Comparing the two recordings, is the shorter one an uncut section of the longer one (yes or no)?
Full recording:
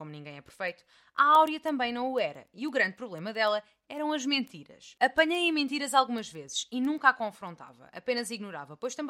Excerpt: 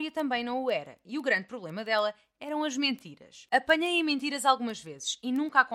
yes